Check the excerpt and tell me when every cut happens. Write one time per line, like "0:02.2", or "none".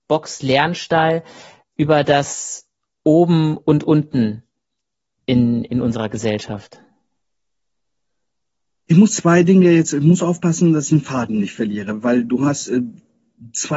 none